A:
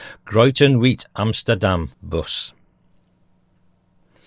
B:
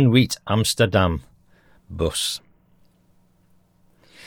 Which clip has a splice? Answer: A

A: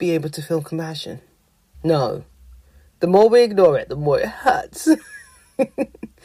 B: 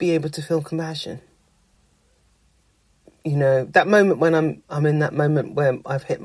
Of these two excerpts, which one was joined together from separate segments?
A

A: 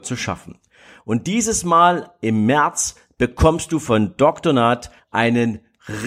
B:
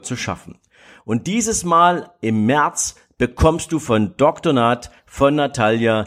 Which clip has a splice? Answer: A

